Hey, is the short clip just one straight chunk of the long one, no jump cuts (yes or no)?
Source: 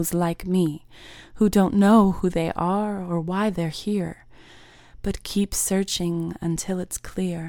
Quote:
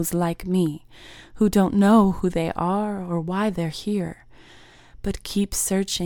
yes